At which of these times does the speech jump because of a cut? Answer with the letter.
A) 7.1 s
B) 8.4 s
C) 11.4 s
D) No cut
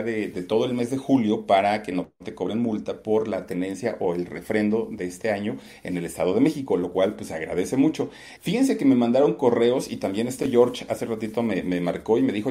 B